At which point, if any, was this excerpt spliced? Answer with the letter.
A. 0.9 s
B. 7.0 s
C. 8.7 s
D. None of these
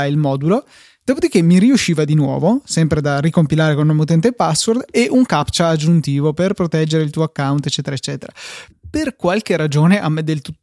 C